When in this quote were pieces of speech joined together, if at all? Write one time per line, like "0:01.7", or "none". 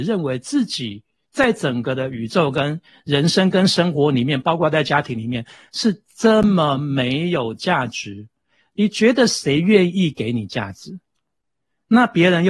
none